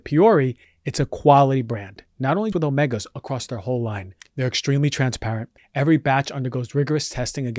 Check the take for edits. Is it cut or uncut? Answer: cut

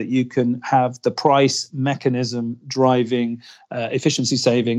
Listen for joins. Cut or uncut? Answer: uncut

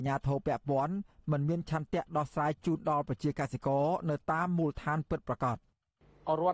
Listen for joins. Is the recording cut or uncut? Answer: uncut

